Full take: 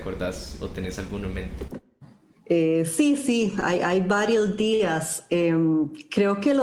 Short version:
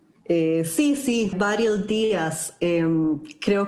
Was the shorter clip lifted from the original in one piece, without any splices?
no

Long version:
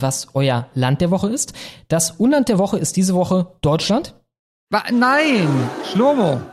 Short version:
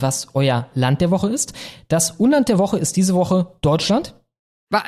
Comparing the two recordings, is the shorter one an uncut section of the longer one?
yes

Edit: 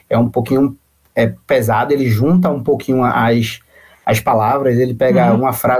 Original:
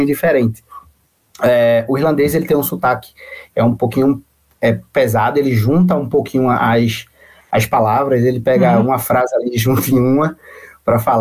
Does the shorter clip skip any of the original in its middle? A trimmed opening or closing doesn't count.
no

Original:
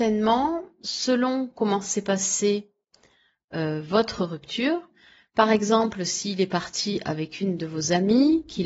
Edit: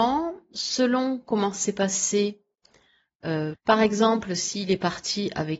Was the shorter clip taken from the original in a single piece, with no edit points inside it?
no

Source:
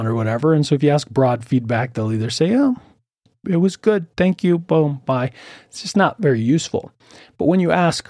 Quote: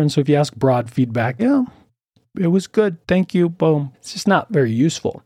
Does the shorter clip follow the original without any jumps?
no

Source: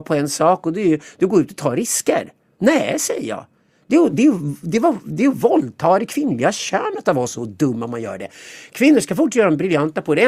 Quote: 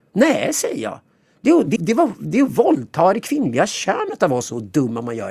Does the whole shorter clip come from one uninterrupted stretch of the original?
no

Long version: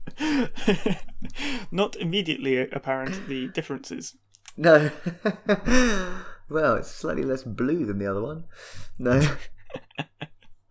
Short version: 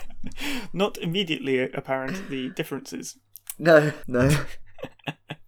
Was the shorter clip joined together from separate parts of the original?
yes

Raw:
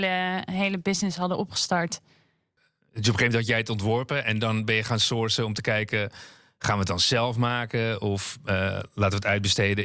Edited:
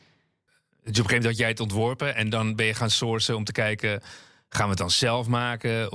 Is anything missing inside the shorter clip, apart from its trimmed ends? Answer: no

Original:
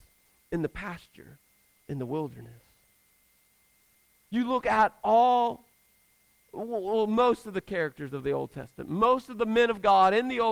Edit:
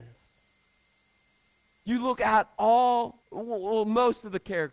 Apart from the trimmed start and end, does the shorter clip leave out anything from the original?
yes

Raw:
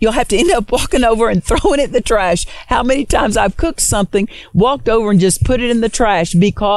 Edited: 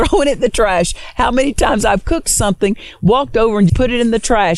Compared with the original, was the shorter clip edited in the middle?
yes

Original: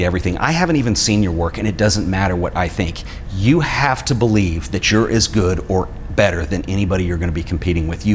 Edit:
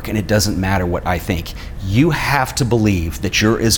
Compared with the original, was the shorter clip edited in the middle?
no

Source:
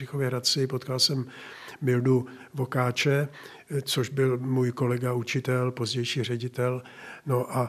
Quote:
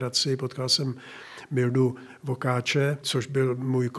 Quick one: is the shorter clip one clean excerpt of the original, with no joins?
no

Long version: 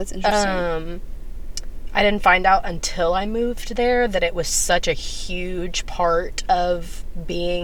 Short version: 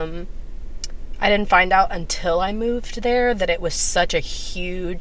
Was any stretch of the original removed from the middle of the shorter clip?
no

